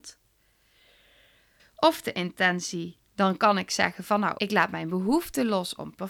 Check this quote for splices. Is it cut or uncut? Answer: cut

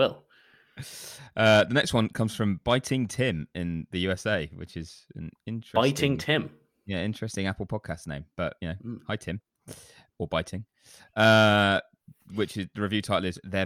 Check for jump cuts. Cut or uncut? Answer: uncut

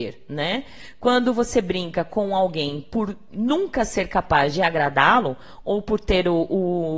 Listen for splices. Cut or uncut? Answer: uncut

